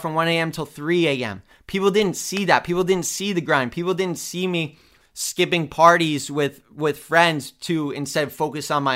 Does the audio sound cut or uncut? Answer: uncut